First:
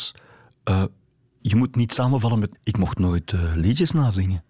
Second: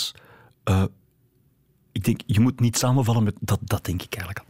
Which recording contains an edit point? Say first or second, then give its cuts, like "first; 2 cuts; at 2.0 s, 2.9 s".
first; 2 cuts; at 1.4 s, 2.5 s